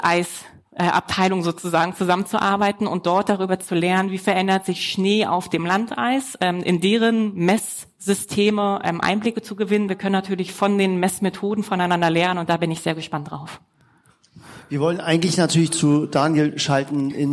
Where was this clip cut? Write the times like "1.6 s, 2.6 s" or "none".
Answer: 9.9 s